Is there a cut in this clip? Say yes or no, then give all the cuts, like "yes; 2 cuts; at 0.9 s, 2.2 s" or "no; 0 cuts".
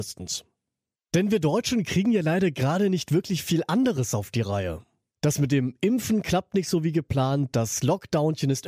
no; 0 cuts